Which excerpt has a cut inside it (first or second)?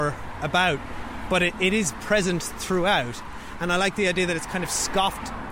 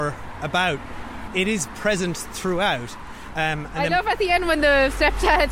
second